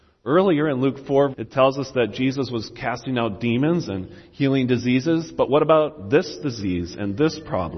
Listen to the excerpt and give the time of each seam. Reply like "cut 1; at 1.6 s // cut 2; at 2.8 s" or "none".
cut 1; at 1.3 s

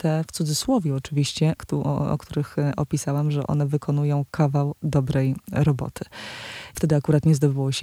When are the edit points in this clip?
cut 1; at 1.6 s // cut 2; at 6.7 s

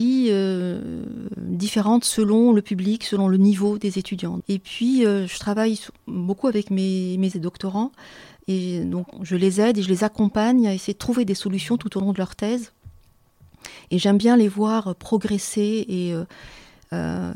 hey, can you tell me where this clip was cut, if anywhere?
cut 1; at 4.4 s // cut 2; at 7.3 s // cut 3; at 9.1 s

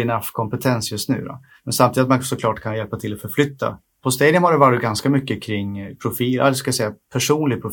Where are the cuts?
none

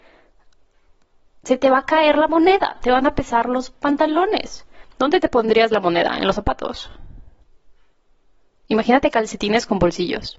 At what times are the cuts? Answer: none

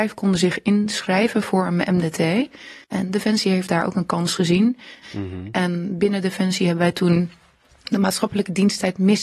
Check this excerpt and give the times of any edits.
cut 1; at 2.8 s // cut 2; at 5.0 s

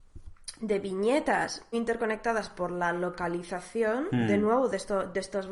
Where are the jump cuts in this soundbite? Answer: cut 1; at 1.7 s

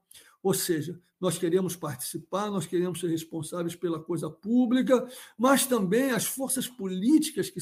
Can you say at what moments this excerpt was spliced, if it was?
none

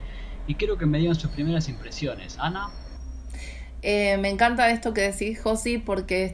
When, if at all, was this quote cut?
none

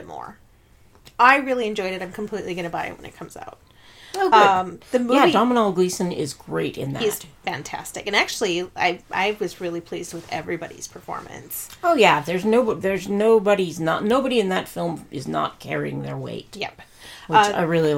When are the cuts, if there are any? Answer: none

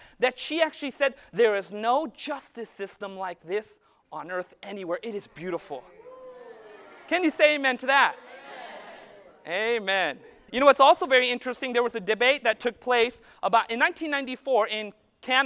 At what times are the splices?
cut 1; at 10.5 s

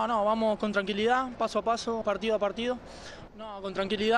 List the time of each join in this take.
cut 1; at 2.0 s // cut 2; at 3.3 s

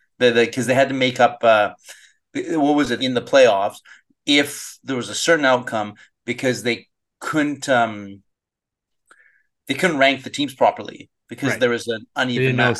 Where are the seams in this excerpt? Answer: cut 1; at 3.0 s

